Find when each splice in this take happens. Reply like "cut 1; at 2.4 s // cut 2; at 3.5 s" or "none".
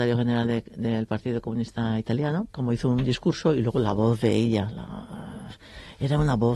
cut 1; at 2.5 s